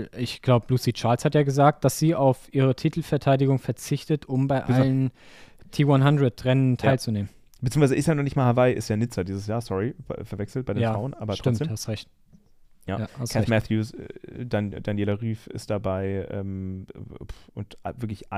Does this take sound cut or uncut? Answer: uncut